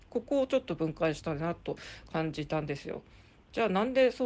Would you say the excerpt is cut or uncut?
uncut